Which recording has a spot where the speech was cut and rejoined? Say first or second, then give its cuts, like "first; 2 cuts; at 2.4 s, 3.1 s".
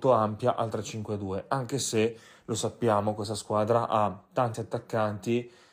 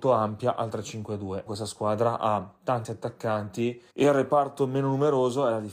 second; 2 cuts; at 1.5 s, 3.9 s